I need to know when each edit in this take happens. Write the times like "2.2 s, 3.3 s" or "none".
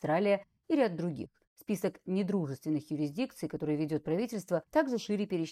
1.5 s